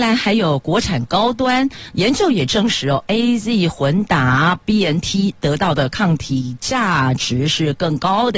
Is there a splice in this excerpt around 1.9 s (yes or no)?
yes